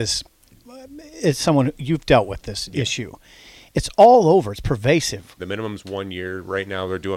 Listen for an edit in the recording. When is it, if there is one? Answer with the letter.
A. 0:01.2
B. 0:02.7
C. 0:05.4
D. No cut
C